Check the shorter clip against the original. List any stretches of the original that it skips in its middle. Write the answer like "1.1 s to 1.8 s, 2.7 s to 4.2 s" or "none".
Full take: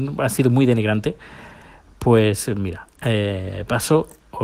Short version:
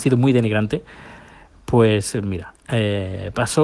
none